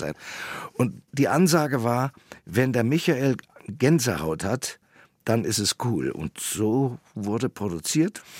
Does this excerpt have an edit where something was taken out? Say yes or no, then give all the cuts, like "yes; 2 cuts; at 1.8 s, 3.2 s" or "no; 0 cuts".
no; 0 cuts